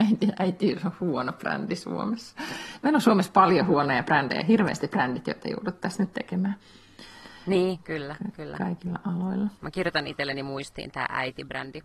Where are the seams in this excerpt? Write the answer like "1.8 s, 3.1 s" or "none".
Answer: 9.6 s

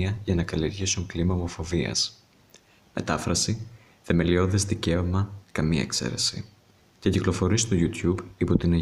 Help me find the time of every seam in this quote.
2.8 s, 5.4 s

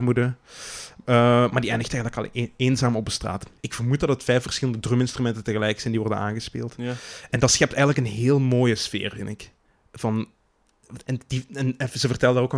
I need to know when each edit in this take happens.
3.6 s

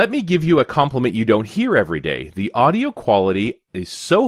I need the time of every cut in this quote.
none

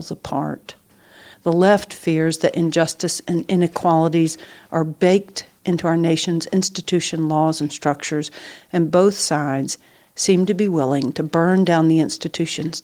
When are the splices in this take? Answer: 1.3 s

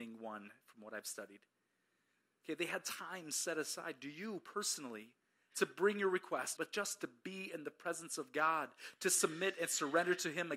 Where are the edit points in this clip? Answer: 5.5 s, 6.6 s

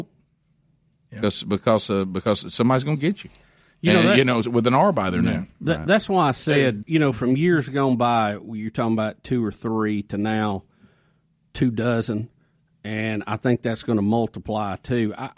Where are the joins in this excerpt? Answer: 6.8 s

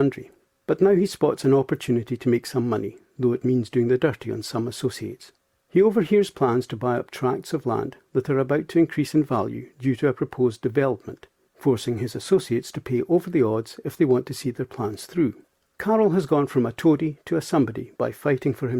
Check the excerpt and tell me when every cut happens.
11.5 s, 15.7 s

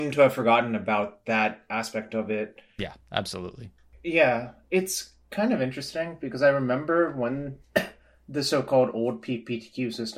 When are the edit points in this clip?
2.8 s

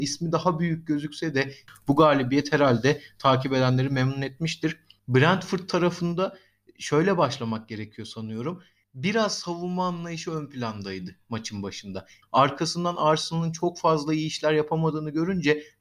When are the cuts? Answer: 12.2 s

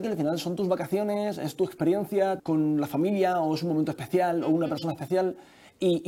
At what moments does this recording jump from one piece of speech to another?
2.4 s

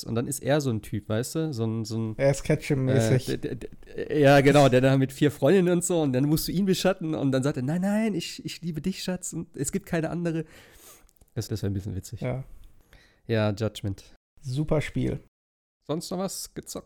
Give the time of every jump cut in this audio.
11.5 s

